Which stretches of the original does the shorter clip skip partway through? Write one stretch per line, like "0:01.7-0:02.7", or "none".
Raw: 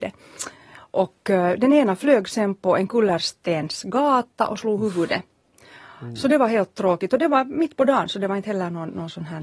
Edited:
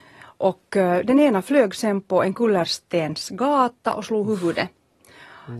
none